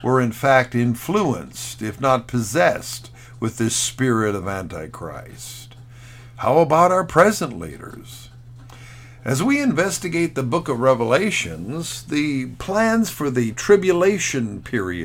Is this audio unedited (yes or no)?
yes